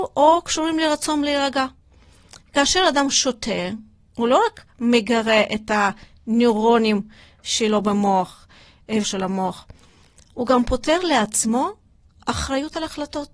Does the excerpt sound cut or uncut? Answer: cut